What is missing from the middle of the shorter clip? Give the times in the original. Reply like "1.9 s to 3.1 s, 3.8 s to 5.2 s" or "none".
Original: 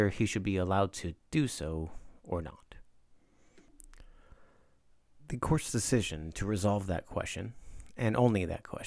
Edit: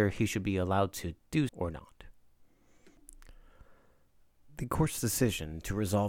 1.5 s to 2.2 s

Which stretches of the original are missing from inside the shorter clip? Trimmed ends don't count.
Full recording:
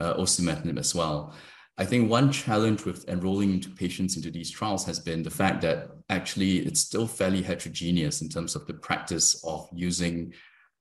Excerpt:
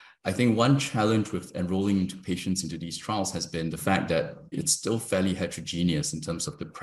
6.0 s to 6.6 s

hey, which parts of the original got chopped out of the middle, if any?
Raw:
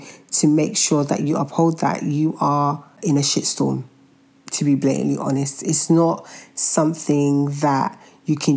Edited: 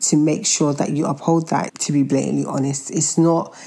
2.0 s to 4.4 s

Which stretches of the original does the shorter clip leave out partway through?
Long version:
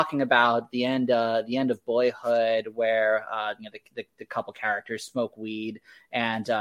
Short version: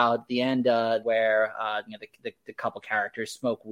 1.5 s to 2.7 s

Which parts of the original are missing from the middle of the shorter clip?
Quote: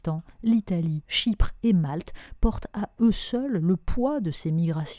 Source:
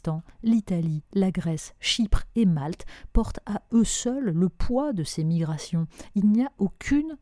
1.0 s to 1.8 s

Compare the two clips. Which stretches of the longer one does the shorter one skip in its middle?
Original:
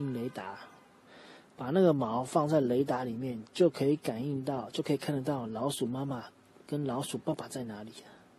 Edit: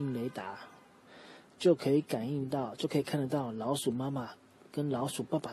1.5 s to 3.5 s

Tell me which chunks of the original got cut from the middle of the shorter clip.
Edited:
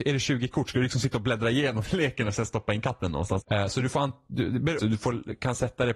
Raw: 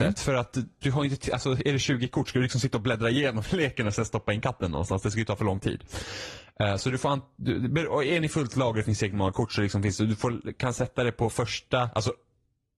5.0 s to 6.5 s, 7.9 s to 10.0 s

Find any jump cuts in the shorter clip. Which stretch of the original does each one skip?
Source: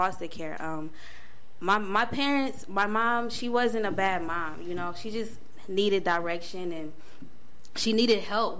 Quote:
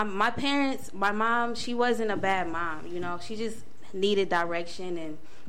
none

